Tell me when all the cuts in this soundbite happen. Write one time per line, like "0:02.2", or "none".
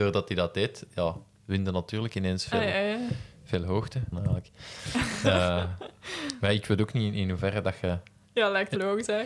0:04.1